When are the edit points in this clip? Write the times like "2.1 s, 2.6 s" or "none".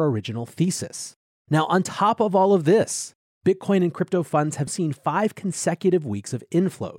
1.3 s, 4.7 s